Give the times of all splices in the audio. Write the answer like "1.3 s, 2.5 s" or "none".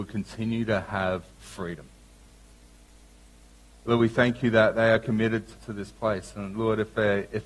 3.7 s, 5.5 s